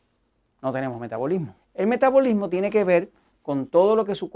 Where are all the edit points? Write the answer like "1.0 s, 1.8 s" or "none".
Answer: 1.6 s